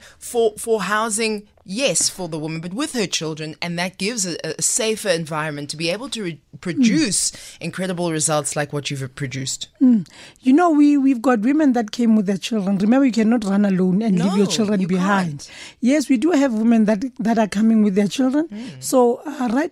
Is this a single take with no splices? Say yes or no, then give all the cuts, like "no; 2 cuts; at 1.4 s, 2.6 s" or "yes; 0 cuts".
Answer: yes; 0 cuts